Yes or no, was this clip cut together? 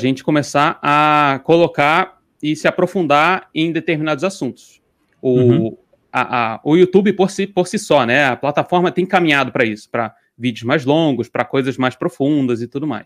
no